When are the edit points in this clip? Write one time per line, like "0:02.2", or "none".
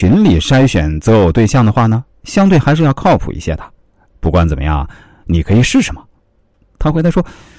none

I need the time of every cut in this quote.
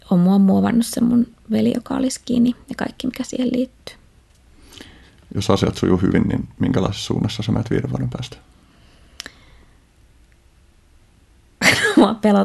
0:10.3

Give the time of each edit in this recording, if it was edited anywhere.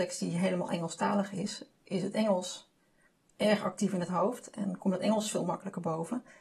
none

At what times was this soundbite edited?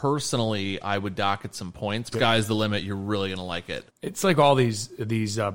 0:02.1
0:03.9

